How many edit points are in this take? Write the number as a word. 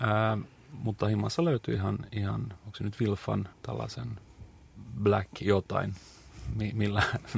one